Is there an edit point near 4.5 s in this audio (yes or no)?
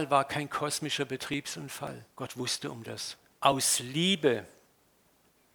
no